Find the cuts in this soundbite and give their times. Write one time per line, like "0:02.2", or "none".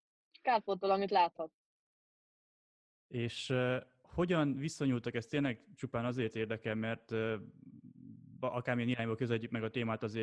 none